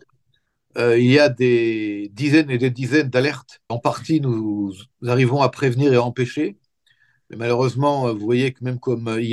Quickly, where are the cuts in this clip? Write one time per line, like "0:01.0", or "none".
0:03.7